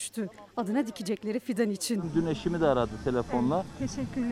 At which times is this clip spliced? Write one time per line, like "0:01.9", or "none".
none